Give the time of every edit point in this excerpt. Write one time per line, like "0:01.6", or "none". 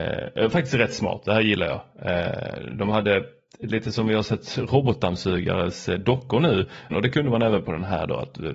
0:06.9